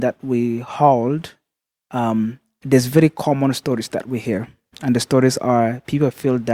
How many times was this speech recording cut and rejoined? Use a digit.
0